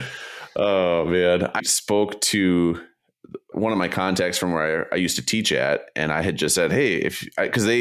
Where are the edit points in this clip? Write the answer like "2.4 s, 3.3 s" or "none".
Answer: 1.6 s, 3.5 s